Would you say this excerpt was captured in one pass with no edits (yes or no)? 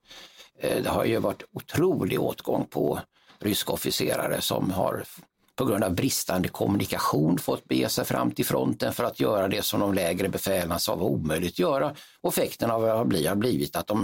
yes